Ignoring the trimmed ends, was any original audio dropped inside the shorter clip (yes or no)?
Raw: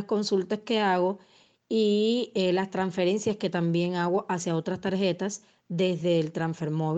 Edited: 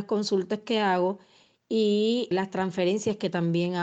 yes